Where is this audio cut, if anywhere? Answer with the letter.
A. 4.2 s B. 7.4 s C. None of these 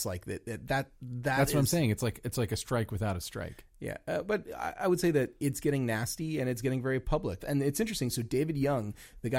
B